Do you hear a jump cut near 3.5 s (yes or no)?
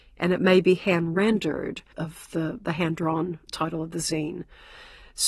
yes